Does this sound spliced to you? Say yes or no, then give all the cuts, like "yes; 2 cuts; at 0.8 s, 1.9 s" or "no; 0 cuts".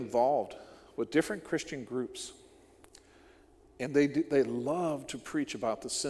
no; 0 cuts